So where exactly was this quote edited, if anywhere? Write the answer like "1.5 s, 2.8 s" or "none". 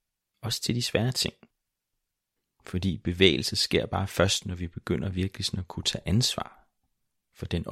none